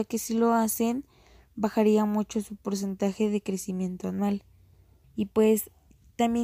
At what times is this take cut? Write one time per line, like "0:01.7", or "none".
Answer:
0:05.0